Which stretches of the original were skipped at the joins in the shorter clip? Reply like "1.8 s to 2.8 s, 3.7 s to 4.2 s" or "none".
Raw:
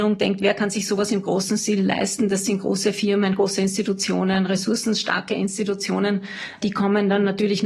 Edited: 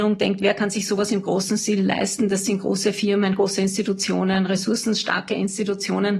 none